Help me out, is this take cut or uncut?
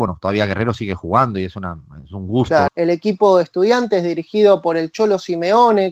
cut